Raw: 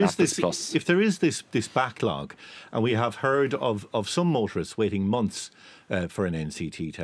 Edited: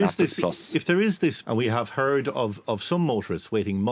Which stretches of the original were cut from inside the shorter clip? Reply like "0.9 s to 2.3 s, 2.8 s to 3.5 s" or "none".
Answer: 1.4 s to 2.7 s